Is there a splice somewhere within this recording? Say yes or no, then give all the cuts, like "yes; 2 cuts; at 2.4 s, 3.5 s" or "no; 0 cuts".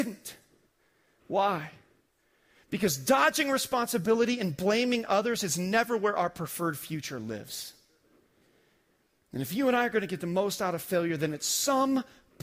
no; 0 cuts